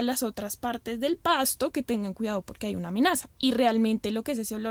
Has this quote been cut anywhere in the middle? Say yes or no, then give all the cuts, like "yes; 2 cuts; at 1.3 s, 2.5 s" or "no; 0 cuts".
yes; 1 cut; at 3.3 s